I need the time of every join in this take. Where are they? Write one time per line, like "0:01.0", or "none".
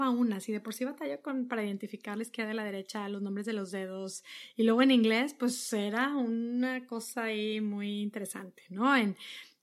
none